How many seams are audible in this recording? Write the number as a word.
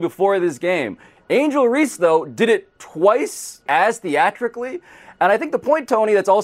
one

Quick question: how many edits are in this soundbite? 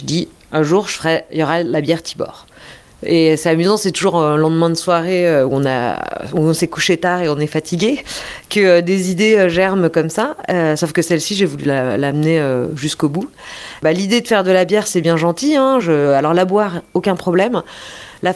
zero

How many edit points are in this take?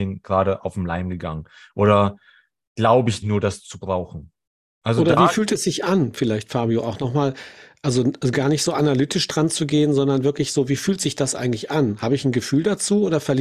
one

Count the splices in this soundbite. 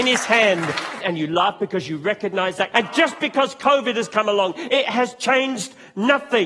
two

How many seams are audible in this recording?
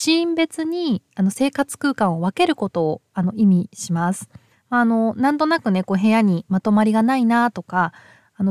one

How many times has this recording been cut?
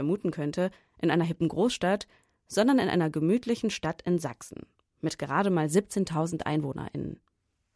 zero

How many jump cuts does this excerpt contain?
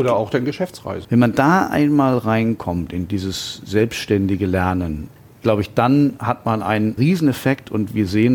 one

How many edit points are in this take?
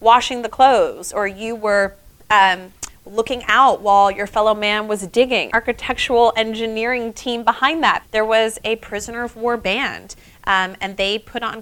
two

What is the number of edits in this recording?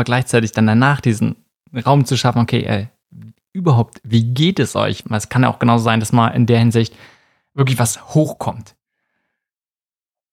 one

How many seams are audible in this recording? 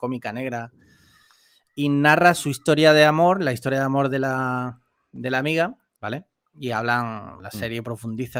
two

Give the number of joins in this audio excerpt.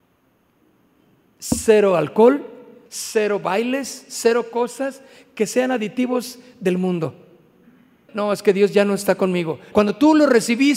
three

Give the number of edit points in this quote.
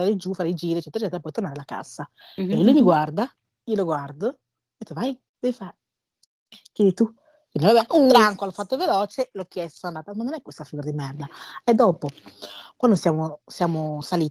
one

